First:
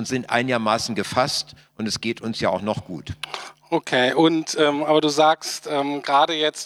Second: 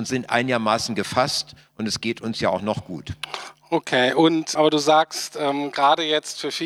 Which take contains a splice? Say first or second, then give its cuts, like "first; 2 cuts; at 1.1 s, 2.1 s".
second; 1 cut; at 4.6 s